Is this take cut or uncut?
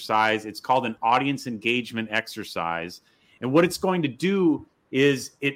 uncut